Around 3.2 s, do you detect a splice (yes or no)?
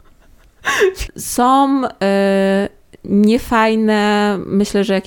no